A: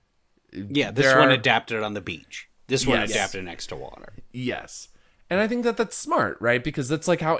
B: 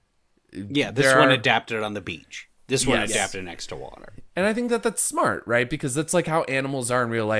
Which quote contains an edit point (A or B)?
B